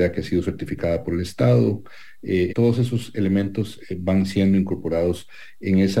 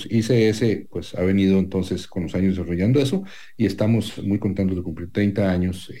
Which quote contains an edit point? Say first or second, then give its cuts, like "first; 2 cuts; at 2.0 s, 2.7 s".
first; 1 cut; at 2.5 s